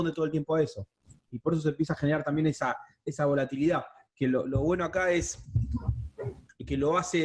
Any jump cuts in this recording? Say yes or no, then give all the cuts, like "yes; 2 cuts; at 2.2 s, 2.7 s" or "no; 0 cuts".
no; 0 cuts